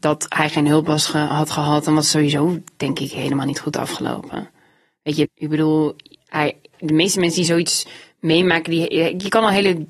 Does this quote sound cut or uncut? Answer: cut